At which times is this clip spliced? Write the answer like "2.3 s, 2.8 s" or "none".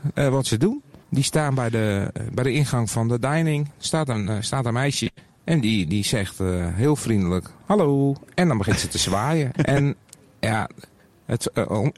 1.0 s, 9.5 s